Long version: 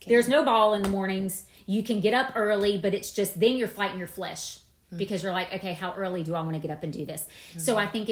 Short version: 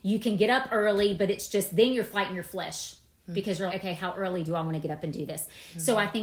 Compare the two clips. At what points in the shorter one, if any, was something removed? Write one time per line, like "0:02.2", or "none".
0:03.7

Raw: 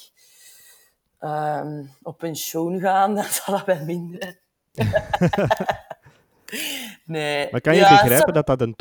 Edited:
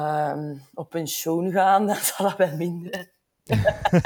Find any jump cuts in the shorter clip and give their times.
none

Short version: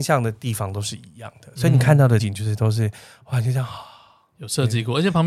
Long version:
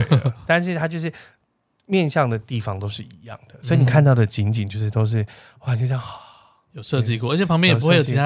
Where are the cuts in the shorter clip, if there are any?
0:02.2

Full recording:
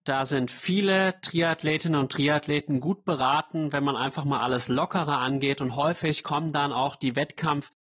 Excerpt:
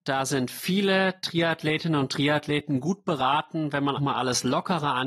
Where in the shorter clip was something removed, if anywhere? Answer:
0:04.0

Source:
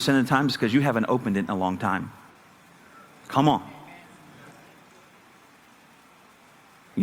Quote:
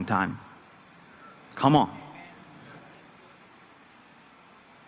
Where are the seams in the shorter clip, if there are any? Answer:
none

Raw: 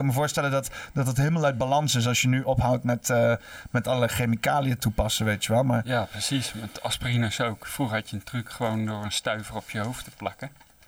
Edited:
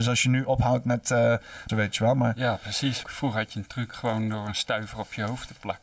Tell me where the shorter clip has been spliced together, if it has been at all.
0:01.7
0:03.0

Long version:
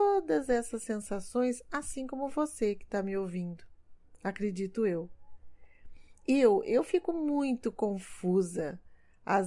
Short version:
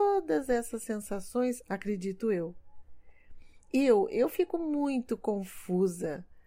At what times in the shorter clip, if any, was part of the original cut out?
0:01.6

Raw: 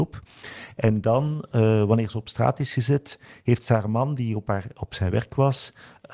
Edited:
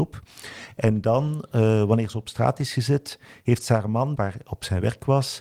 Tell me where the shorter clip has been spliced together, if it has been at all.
0:04.2

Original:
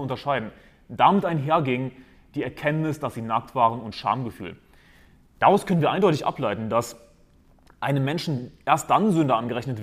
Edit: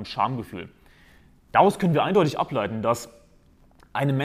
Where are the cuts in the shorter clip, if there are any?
none

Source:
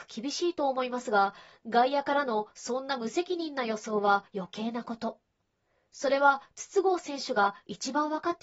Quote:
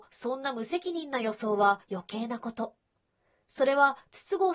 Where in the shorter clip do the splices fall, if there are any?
none

